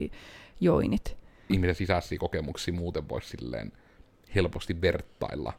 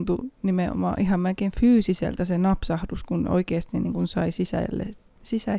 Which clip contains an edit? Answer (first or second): first